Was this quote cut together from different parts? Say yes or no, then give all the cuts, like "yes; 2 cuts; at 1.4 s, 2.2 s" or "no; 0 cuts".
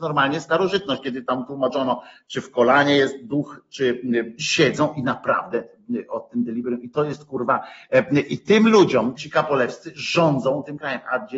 yes; 2 cuts; at 4.4 s, 9.2 s